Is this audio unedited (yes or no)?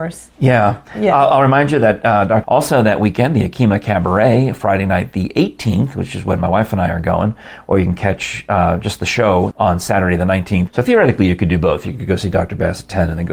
no